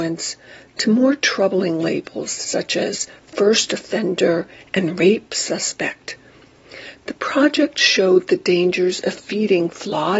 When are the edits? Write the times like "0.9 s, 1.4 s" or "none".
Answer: none